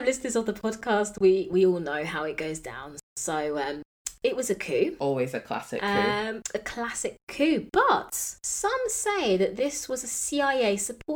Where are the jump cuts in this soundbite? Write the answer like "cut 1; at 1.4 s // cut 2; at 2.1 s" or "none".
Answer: none